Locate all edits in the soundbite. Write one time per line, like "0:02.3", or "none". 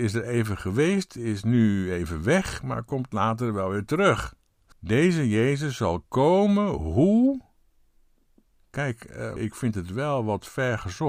0:04.7
0:09.4